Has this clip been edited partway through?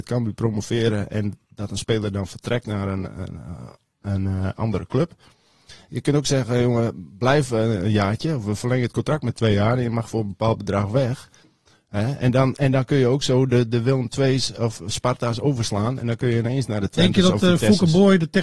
no; 0 cuts

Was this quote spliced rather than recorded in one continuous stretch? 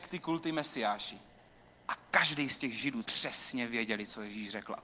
yes; 2 cuts; at 1.8 s, 3.0 s

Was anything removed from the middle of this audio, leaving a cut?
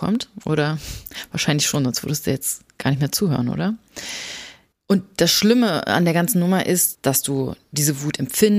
yes; 2 cuts; at 4.7 s, 6.9 s

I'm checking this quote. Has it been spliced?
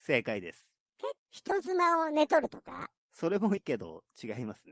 yes; 2 cuts; at 1.2 s, 3.6 s

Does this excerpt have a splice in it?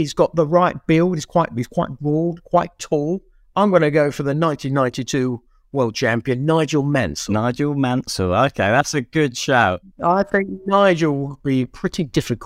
no; 0 cuts

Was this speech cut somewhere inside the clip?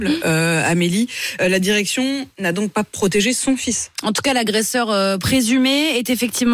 no; 0 cuts

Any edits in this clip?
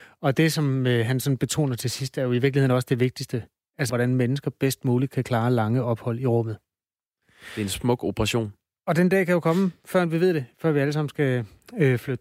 yes; 1 cut; at 3.9 s

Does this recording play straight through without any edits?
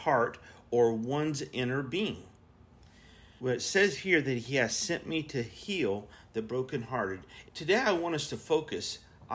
no; 2 cuts; at 3.4 s, 7.5 s

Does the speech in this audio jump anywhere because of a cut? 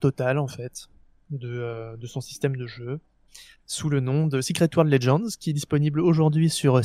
no; 0 cuts

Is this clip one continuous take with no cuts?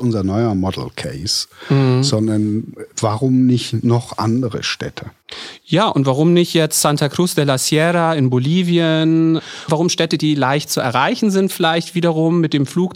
yes; 0 cuts

